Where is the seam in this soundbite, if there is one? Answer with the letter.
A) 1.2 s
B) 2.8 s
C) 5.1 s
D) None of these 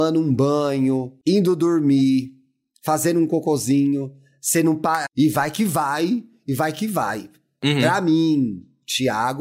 C